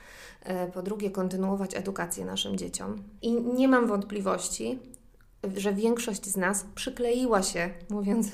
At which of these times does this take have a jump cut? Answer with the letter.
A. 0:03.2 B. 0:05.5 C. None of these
A